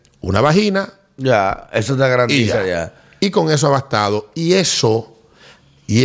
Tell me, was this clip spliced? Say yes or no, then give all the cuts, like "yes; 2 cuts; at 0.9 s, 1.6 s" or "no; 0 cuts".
no; 0 cuts